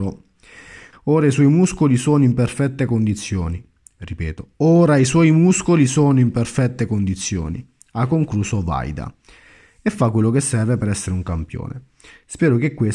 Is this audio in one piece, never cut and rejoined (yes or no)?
no